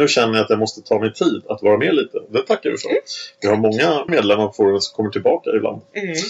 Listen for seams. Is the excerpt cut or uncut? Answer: cut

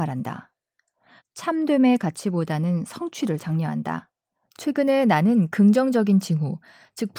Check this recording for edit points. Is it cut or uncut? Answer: cut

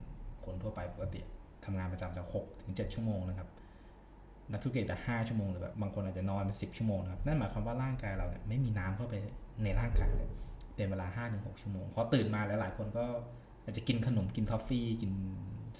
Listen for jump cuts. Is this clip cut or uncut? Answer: cut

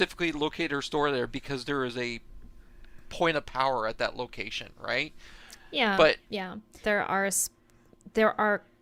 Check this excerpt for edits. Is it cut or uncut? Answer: cut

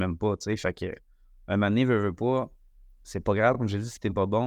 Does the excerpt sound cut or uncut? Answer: uncut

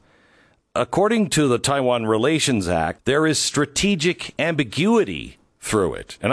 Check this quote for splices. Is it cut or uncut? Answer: cut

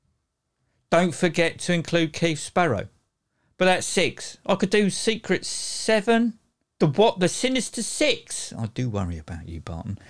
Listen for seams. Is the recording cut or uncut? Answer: uncut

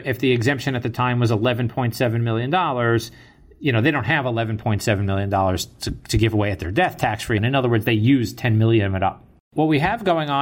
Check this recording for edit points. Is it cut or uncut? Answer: cut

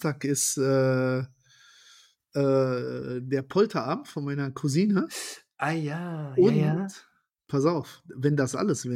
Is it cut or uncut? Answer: uncut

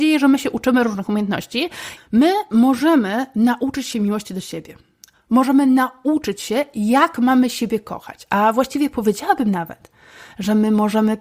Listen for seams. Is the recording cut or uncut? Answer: cut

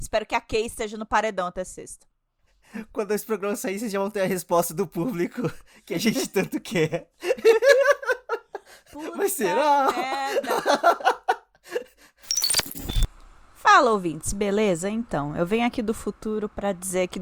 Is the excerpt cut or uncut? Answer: uncut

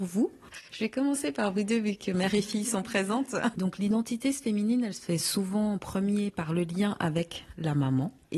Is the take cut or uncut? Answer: cut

